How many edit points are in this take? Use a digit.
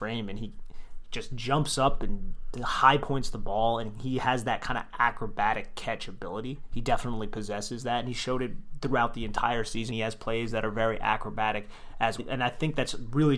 2